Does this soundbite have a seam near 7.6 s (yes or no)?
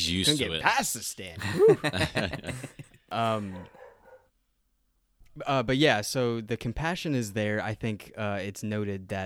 no